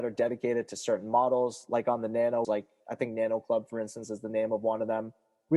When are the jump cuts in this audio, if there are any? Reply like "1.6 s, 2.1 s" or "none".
2.4 s